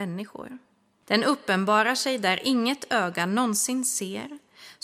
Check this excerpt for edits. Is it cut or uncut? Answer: cut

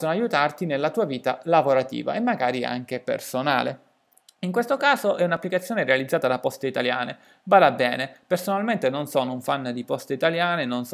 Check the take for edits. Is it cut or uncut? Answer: uncut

